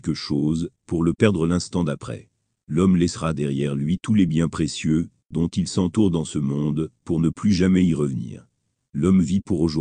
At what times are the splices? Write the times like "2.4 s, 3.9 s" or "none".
2.5 s